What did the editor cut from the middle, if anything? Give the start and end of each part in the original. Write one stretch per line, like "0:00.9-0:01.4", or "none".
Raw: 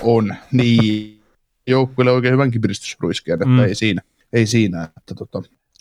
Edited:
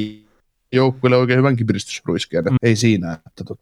0:03.5-0:04.3